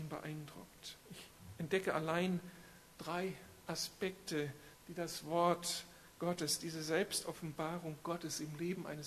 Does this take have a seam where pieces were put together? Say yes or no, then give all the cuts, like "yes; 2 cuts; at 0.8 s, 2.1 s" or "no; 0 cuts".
yes; 2 cuts; at 1.0 s, 4.7 s